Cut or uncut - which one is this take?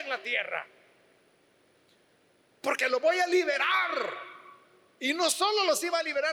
uncut